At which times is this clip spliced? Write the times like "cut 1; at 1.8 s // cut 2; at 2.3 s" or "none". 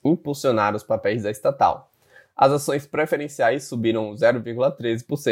none